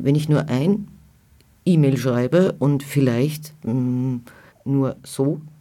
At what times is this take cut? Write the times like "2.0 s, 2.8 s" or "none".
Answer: 4.5 s